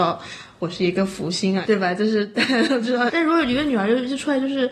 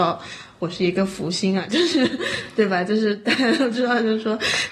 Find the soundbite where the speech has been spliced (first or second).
first